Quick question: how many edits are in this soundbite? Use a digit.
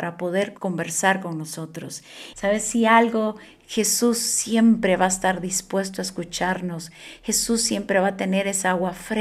1